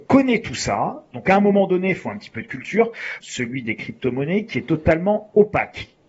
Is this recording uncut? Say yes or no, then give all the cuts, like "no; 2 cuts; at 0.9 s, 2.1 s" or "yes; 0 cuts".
no; 2 cuts; at 1.1 s, 3.2 s